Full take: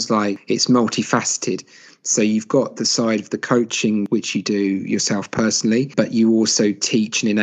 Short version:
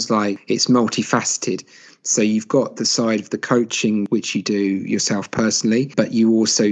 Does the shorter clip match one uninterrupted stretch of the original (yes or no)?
yes